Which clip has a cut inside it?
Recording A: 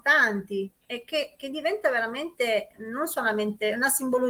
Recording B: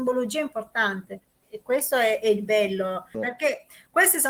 B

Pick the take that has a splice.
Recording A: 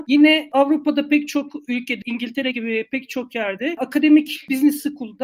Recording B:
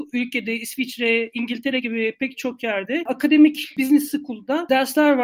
A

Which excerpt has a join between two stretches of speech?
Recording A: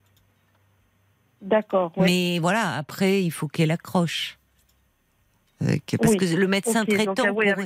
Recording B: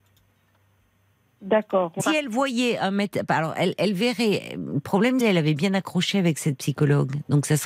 B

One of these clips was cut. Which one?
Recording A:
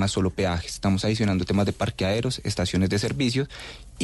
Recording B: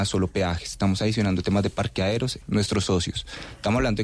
B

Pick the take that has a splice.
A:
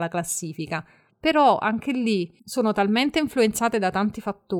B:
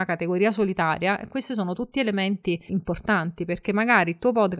A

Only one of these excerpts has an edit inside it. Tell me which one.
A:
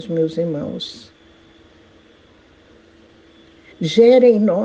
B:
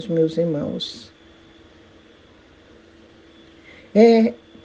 A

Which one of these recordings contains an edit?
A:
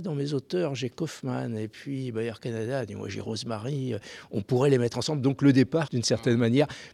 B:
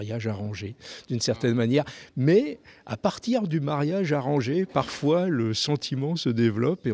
A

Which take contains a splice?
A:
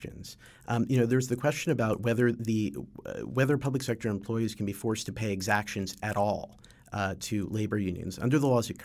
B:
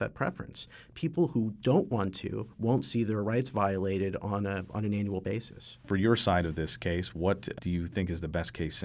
B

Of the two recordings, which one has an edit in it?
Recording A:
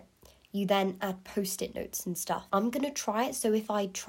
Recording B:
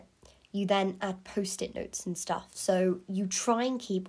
A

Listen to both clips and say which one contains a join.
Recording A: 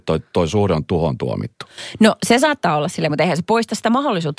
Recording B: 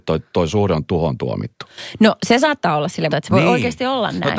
B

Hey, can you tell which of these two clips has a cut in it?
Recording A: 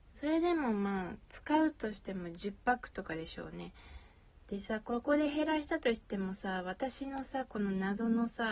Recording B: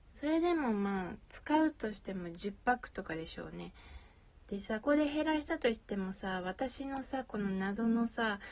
B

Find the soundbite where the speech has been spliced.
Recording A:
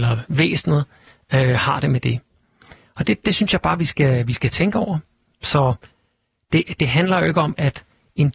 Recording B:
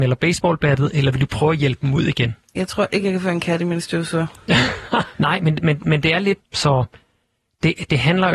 B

